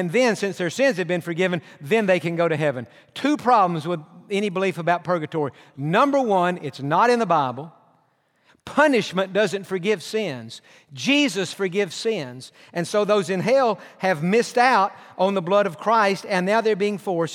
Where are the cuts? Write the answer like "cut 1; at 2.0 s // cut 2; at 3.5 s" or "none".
cut 1; at 8.5 s